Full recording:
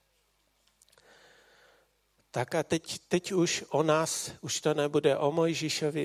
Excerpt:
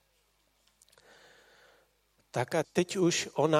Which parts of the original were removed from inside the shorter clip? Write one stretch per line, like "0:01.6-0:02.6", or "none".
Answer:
0:02.6-0:03.0

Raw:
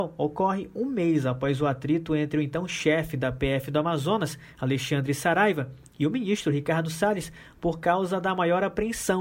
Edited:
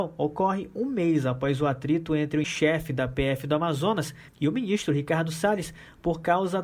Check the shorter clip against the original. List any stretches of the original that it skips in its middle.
0:02.4-0:02.7
0:04.5-0:05.9

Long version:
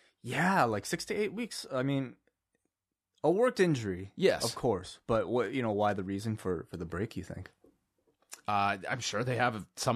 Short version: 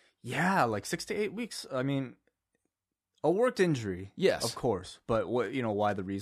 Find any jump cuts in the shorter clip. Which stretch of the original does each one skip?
none

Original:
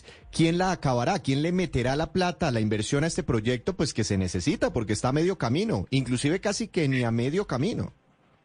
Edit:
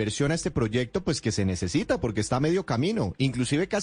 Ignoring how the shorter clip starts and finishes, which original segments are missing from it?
none

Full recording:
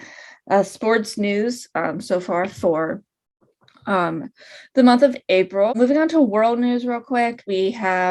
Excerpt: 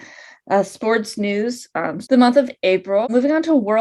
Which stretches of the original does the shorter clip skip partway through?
0:02.0-0:04.7

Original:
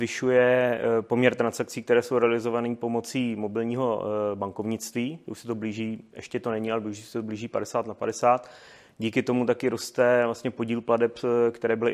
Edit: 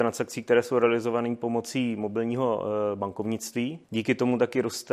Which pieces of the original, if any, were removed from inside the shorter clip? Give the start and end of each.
0:05.2-0:08.9

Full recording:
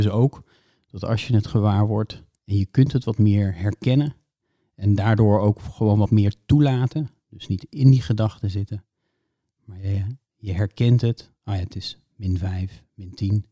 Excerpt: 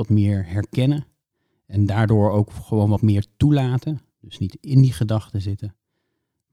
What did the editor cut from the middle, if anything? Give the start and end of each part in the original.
none

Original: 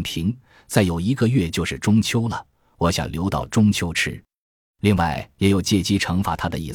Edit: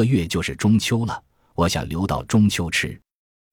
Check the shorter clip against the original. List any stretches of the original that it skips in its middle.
none

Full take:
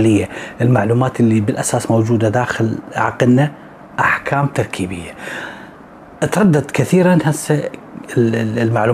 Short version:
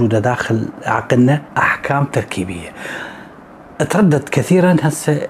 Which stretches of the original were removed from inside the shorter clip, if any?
0:03.6-0:03.9

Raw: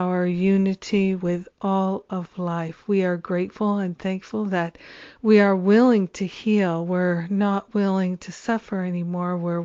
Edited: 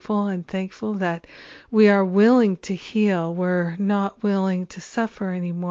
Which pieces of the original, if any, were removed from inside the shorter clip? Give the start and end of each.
none

